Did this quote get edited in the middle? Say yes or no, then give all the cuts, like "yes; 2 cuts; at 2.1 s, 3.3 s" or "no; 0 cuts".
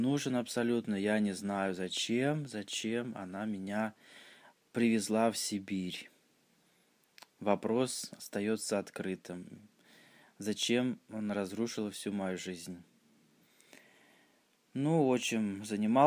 no; 0 cuts